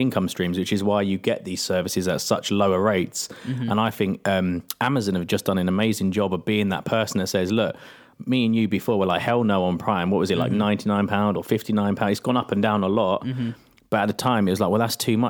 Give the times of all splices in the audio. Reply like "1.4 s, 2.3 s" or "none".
none

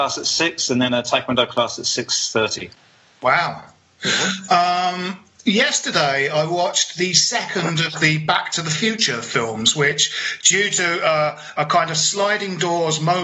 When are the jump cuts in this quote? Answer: none

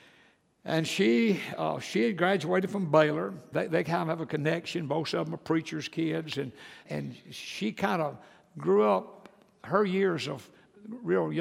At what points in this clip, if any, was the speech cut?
3.5 s, 6.9 s

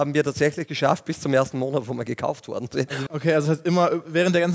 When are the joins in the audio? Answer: 3.1 s

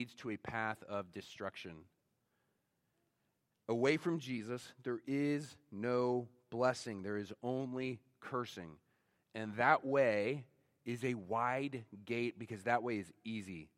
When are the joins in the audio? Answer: none

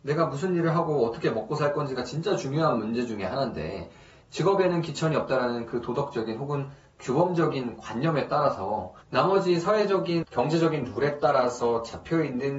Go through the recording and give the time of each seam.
9.0 s

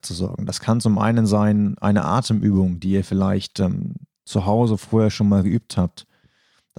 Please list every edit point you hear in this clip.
none

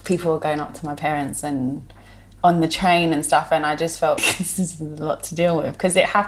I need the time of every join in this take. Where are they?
4.2 s

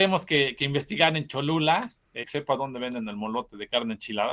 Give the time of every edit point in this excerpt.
2.2 s

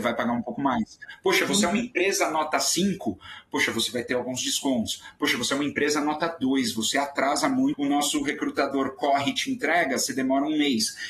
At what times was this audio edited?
7.7 s

